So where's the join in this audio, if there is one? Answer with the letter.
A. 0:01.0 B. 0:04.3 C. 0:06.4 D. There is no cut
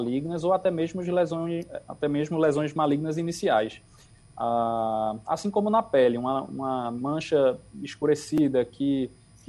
D